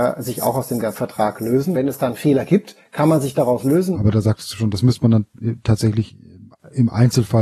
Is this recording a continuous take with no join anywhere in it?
no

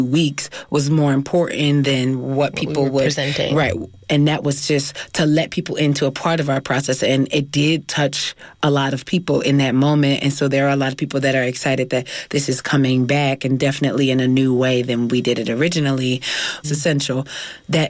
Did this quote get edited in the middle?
yes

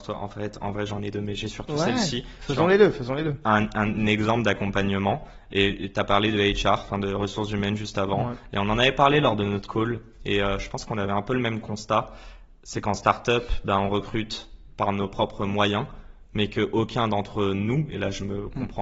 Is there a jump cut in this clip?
no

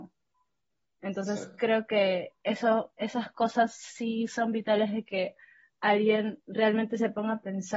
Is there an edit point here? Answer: no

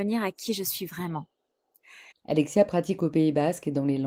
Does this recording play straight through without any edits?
no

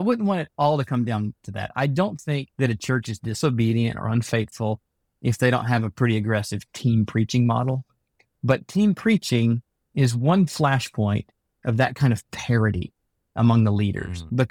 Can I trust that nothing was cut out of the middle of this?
no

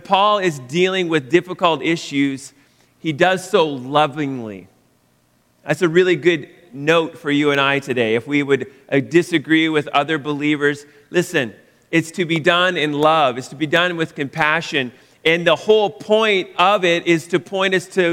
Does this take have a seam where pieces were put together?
no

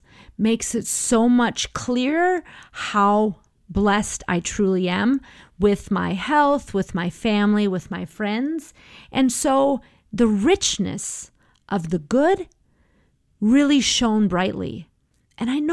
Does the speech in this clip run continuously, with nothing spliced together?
yes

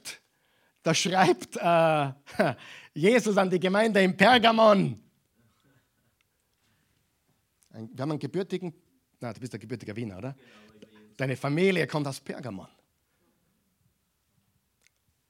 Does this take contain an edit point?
no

